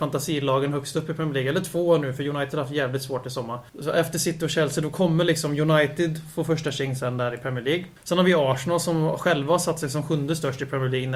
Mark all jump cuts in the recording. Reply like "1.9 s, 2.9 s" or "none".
3.7 s, 8.0 s